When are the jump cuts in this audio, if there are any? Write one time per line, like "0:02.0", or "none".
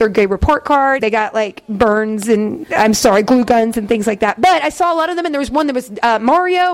0:01.0